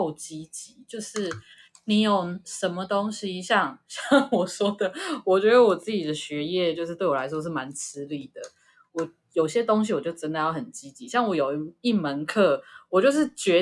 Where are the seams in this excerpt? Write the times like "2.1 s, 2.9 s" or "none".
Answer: none